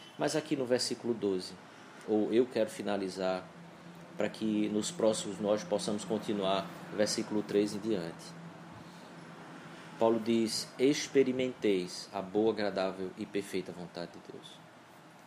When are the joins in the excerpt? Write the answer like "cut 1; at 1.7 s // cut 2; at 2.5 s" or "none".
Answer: cut 1; at 2.0 s